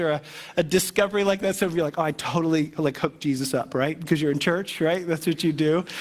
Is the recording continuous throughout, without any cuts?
yes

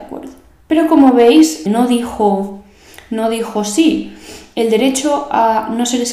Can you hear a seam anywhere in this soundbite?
yes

